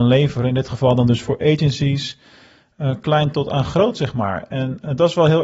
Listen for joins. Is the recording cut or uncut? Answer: uncut